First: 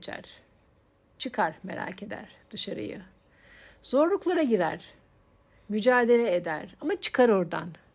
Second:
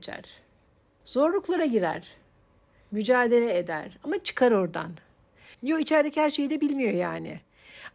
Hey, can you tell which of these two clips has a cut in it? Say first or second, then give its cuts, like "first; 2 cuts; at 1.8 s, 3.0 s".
second; 2 cuts; at 1.0 s, 5.5 s